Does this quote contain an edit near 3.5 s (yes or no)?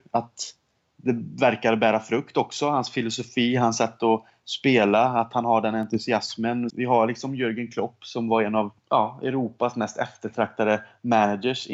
no